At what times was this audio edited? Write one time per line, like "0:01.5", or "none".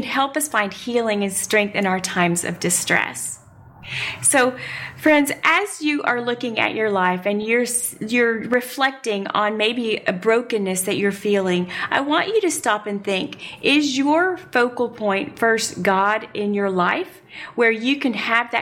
none